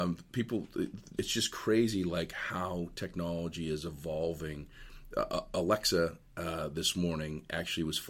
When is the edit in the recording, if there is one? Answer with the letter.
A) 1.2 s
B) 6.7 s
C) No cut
A